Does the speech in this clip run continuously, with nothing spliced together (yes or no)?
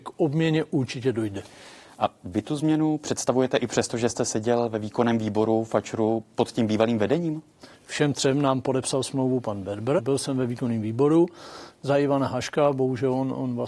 no